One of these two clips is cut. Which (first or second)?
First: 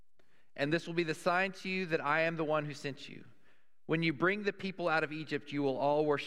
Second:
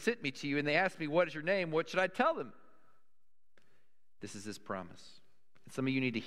second